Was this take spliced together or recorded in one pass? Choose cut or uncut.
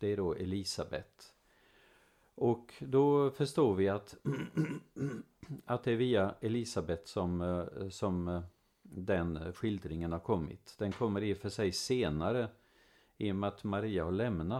uncut